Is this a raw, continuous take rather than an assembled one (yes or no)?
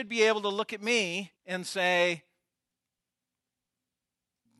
no